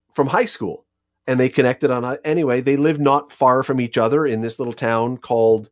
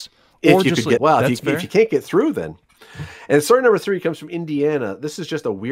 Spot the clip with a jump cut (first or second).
second